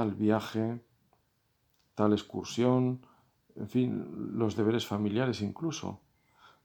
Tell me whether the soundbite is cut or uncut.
uncut